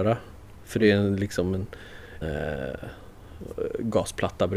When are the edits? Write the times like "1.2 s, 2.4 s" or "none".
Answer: 2.2 s